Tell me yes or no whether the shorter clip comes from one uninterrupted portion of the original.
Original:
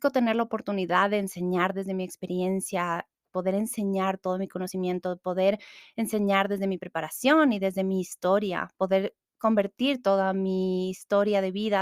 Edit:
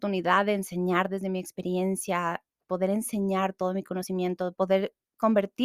no